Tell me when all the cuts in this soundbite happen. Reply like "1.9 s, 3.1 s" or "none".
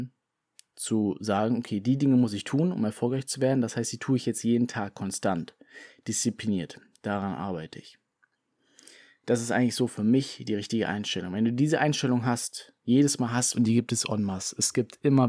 13.5 s